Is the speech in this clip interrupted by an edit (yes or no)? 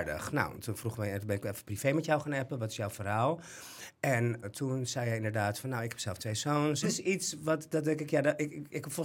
yes